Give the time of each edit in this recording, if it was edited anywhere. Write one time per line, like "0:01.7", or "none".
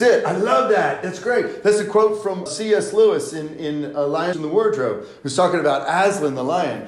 0:02.5
0:04.3